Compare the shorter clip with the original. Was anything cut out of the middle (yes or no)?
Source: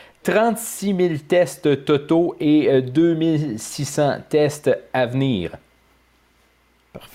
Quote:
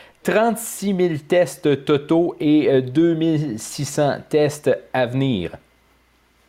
no